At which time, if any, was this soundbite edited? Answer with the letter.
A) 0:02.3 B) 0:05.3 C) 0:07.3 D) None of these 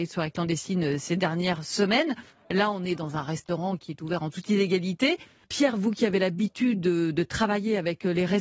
D